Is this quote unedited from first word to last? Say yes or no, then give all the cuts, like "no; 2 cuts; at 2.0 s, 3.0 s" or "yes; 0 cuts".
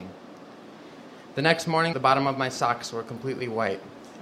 no; 1 cut; at 1.9 s